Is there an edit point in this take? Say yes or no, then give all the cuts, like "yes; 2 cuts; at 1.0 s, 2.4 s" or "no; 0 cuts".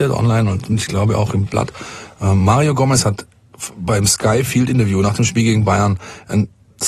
no; 0 cuts